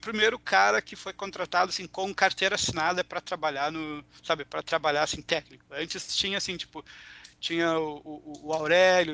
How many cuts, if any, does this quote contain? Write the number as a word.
zero